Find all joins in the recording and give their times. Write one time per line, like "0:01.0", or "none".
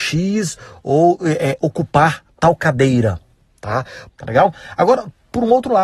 0:04.1